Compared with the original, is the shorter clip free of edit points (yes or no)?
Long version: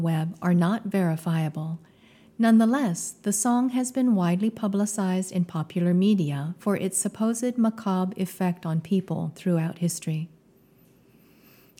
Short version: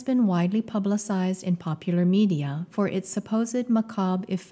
yes